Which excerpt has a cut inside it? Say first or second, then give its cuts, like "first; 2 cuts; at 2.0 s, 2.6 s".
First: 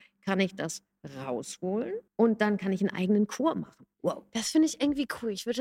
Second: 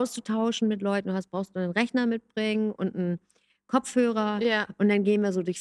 first; 2 cuts; at 2.1 s, 3.9 s